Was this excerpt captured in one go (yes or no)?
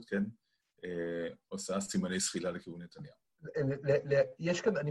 yes